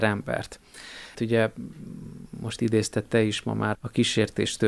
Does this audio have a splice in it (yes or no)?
yes